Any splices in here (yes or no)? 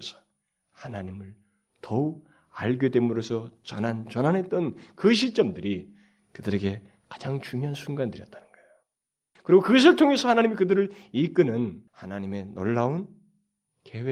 yes